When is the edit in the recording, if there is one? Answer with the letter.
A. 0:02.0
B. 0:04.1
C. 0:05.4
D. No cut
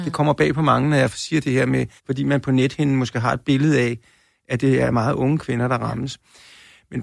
A